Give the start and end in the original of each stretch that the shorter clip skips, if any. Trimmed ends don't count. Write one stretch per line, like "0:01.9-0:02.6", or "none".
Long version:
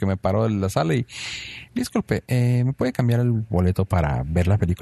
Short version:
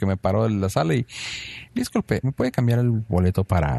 0:02.2-0:02.6